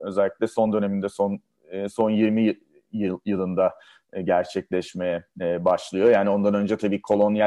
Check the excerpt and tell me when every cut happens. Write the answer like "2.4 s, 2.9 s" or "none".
none